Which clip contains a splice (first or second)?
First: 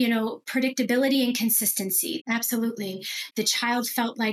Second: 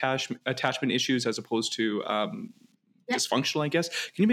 first